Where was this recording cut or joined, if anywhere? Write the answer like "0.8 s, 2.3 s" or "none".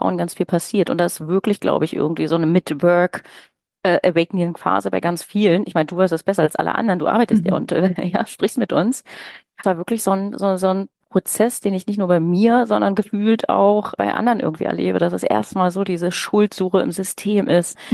9.6 s